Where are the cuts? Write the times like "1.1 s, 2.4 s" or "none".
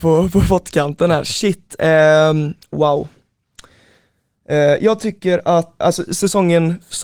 5.8 s